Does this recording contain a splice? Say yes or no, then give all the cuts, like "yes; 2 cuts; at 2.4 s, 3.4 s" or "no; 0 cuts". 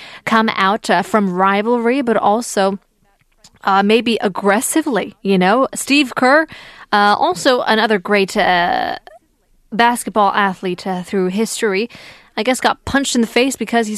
no; 0 cuts